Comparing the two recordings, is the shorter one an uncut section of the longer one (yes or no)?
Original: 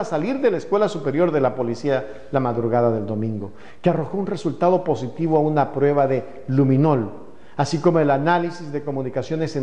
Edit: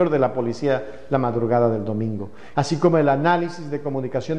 no